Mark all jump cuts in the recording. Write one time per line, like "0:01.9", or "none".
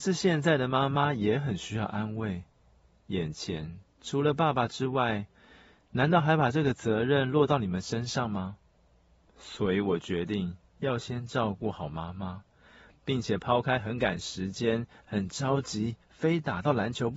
none